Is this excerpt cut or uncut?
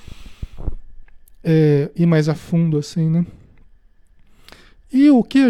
uncut